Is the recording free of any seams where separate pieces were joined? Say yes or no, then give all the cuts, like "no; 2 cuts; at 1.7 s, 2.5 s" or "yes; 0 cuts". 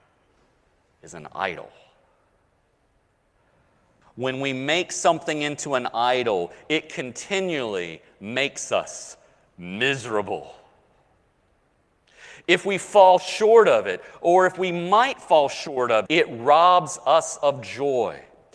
no; 2 cuts; at 4.0 s, 16.1 s